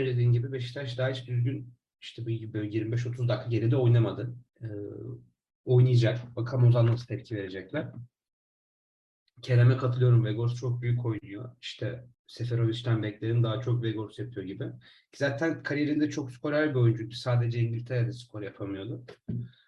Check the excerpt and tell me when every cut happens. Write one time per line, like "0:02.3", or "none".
0:04.5
0:12.1